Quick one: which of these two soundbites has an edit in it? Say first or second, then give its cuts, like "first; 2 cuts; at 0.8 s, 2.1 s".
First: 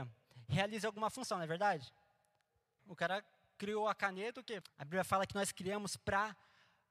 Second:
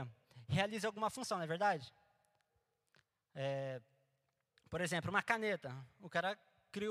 first; 2 cuts; at 2.8 s, 4.6 s